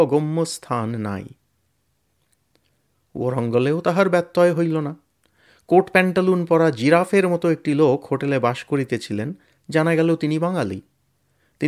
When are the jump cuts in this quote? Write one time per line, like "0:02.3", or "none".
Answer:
none